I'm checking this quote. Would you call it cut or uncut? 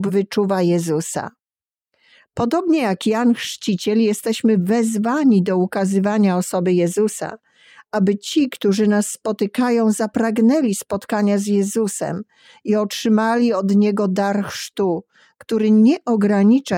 uncut